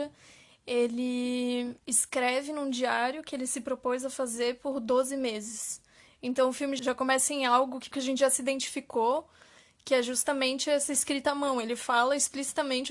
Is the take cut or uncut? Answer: uncut